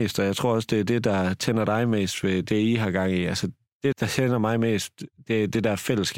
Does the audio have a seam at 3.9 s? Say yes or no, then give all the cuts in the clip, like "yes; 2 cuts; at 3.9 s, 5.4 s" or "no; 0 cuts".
yes; 1 cut; at 3.9 s